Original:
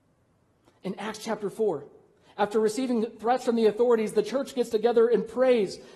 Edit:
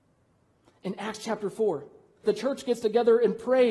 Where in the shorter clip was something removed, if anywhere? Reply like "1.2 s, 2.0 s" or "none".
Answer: 2.2 s